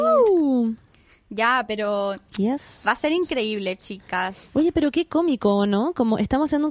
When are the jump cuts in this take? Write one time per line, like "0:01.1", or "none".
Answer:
none